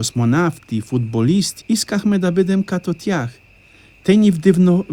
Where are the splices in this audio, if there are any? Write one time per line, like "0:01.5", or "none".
0:01.6